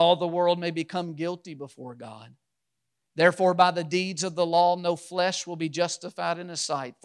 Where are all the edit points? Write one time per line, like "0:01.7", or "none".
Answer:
none

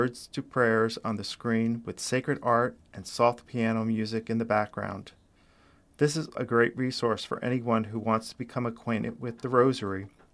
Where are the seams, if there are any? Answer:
0:06.3

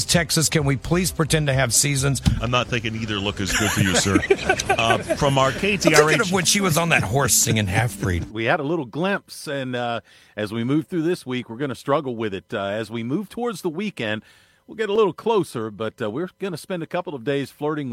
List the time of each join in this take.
0:02.4
0:08.3

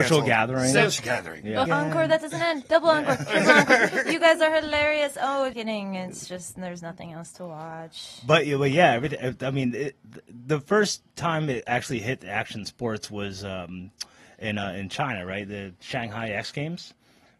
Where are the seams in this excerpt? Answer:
0:01.7
0:05.5

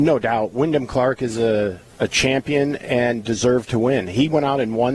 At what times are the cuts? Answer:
none

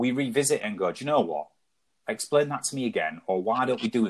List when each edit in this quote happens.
none

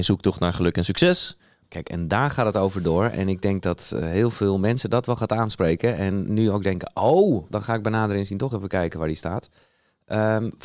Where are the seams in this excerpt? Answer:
0:01.6
0:07.5

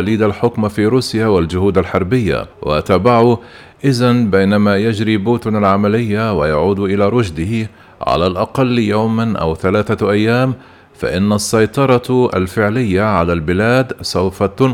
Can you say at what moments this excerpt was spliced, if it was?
0:02.5

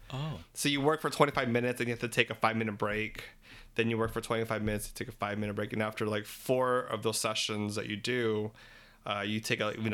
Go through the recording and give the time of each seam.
none

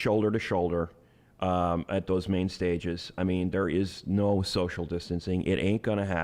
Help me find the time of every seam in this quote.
none

